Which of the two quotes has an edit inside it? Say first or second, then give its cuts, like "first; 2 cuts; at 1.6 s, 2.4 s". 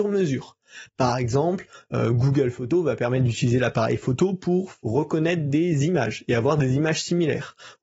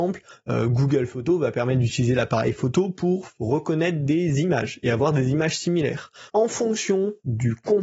second; 1 cut; at 6.3 s